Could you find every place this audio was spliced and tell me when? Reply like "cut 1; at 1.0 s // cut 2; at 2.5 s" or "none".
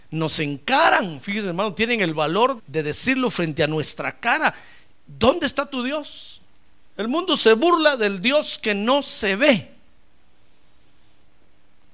cut 1; at 2.6 s // cut 2; at 6.9 s